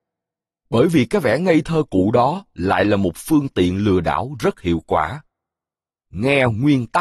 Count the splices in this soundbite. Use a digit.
0